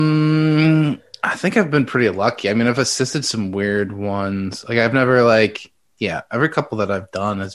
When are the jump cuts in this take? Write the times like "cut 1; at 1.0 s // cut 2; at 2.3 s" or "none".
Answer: none